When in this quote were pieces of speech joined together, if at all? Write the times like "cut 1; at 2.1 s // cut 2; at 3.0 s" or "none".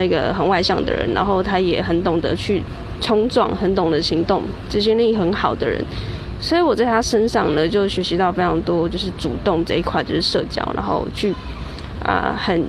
none